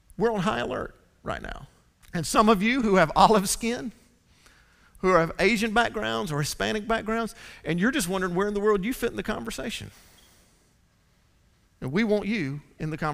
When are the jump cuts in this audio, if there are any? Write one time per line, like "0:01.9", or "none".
0:02.0